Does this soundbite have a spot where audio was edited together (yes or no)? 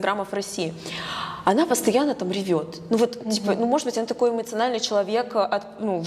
no